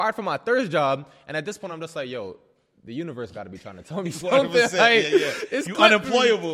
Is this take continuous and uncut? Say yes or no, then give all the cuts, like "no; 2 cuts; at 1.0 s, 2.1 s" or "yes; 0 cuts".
yes; 0 cuts